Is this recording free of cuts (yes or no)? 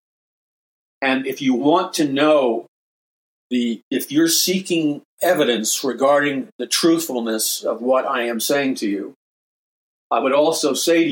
no